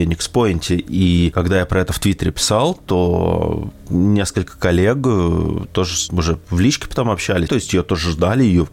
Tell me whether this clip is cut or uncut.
cut